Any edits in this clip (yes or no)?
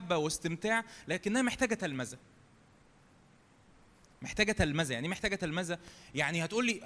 no